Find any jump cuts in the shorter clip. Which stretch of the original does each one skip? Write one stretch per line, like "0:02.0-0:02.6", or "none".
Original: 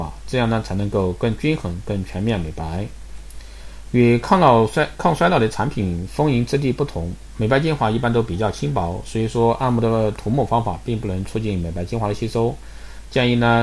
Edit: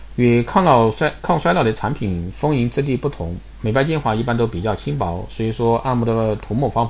none